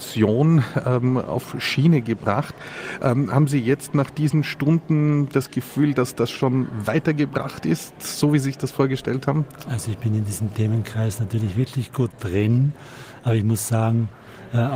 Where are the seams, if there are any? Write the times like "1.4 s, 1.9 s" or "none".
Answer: none